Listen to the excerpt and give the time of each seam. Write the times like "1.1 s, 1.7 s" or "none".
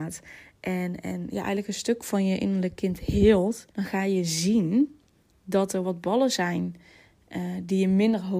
3.7 s